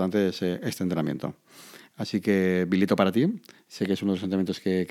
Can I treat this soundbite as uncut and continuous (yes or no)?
yes